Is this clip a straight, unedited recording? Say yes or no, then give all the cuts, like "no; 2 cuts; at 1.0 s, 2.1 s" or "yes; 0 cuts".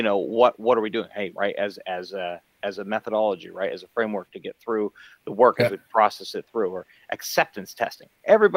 no; 1 cut; at 1.3 s